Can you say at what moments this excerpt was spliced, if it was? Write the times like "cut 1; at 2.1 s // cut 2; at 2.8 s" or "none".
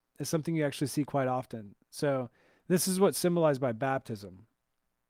none